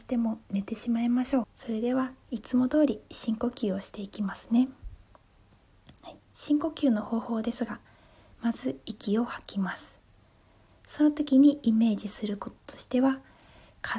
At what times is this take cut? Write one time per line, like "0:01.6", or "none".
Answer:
0:01.4